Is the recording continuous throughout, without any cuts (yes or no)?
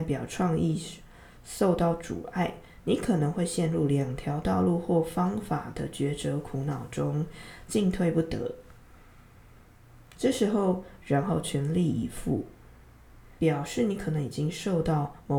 no